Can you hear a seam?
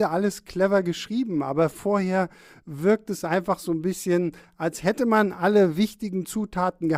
no; 0 cuts

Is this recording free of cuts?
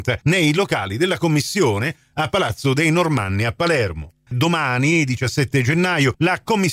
no; 1 cut; at 4.3 s

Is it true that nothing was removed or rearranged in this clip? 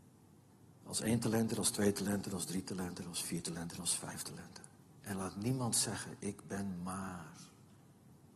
yes; 0 cuts

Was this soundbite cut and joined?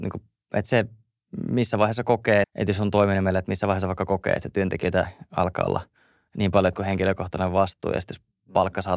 yes; 1 cut; at 2.4 s

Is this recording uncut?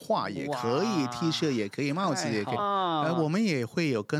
no; 1 cut; at 2.6 s

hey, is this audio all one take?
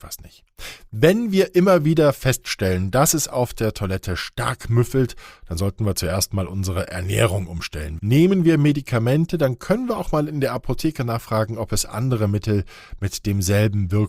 no; 1 cut; at 8.0 s

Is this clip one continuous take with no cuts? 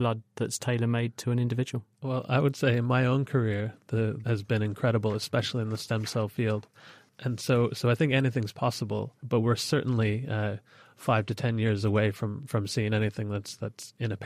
no; 1 cut; at 4.2 s

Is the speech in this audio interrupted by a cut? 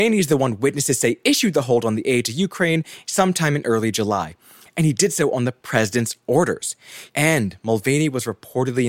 yes; 1 cut; at 7.1 s

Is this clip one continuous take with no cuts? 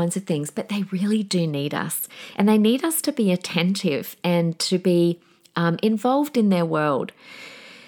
yes; 0 cuts

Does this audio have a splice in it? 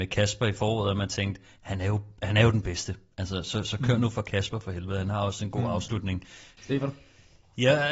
yes; 1 cut; at 6.6 s

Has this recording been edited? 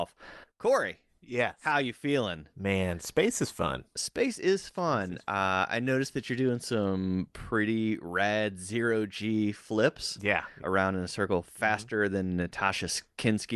yes; 1 cut; at 10.6 s

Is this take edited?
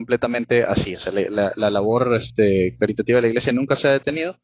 no; 0 cuts

